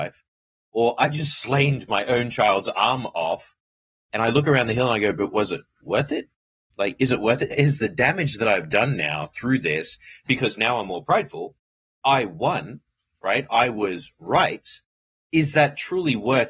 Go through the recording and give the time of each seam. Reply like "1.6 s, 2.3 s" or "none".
none